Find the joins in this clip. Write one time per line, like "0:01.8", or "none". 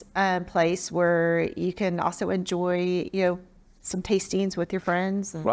none